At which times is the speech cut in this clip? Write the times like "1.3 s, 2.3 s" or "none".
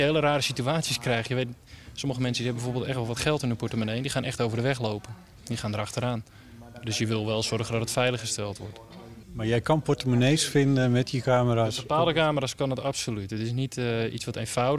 9.2 s